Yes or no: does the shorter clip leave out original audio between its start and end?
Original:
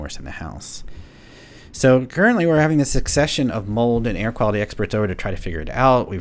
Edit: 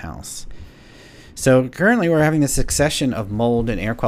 no